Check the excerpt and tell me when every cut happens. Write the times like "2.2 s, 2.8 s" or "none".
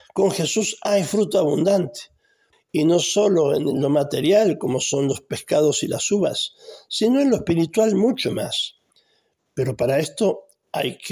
2.5 s